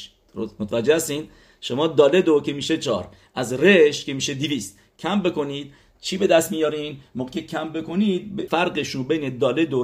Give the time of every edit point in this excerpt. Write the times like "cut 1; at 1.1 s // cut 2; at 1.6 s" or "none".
cut 1; at 8.5 s